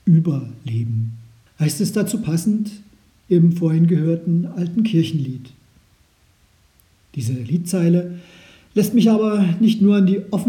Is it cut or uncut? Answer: cut